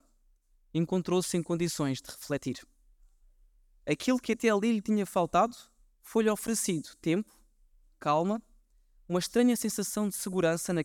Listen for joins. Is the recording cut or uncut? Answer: uncut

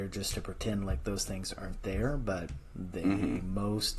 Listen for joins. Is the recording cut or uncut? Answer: uncut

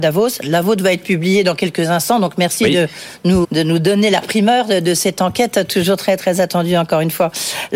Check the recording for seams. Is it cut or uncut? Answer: cut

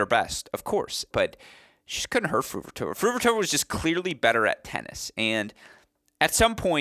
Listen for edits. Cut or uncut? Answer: cut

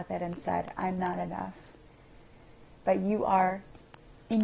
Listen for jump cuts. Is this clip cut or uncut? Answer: uncut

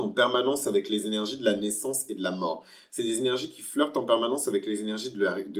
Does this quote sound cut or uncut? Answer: uncut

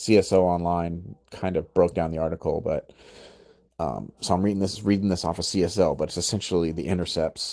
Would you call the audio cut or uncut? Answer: uncut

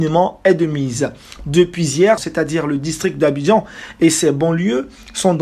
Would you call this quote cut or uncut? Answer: cut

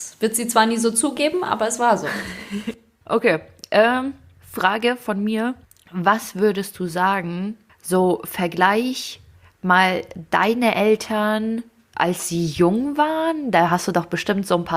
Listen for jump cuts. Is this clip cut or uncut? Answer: uncut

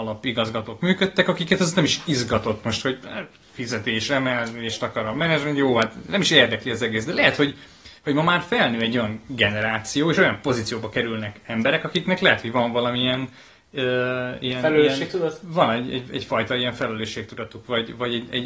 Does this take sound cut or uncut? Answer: uncut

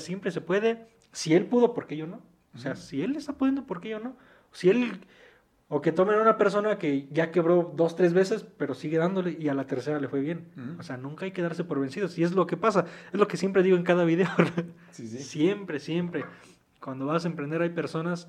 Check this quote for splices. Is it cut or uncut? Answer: uncut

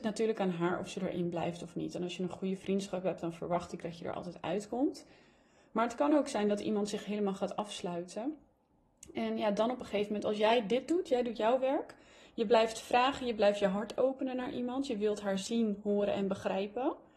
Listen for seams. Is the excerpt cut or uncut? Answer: uncut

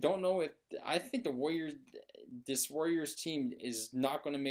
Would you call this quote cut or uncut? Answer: uncut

